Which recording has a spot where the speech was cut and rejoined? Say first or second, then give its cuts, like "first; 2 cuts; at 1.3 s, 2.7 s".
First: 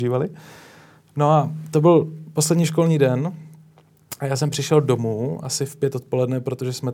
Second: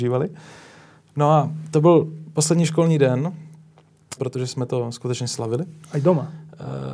second; 1 cut; at 4.2 s